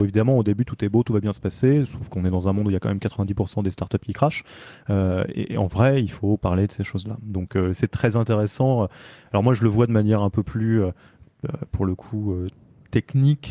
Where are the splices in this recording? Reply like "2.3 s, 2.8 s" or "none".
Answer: none